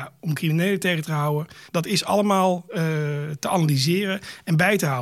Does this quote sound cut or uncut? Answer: cut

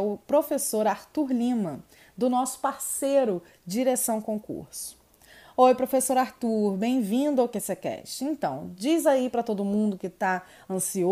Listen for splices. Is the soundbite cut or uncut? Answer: uncut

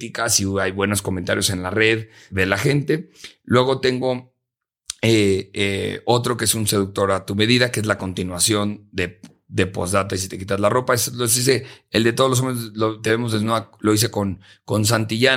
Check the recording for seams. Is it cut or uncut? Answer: cut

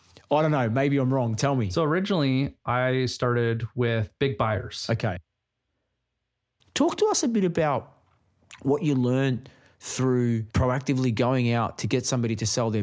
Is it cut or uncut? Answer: cut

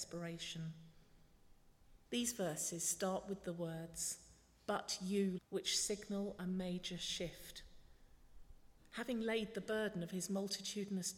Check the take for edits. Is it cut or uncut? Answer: cut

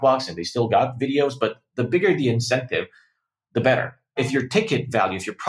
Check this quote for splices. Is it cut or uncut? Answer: uncut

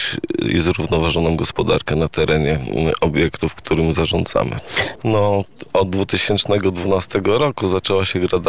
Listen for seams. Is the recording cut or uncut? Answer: cut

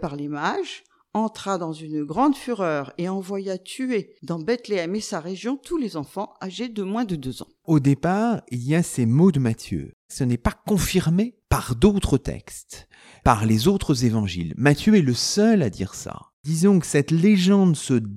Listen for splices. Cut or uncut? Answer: uncut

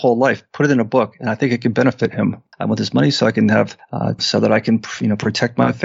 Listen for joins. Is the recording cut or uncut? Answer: cut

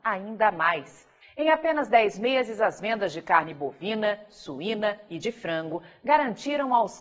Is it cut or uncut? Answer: cut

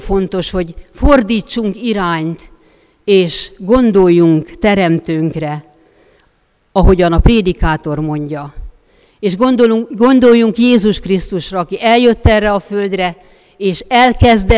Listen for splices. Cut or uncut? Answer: uncut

